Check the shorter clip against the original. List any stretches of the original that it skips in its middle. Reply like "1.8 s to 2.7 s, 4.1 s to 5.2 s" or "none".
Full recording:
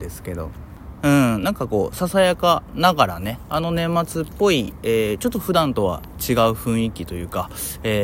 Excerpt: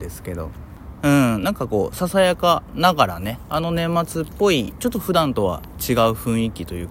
4.8 s to 5.2 s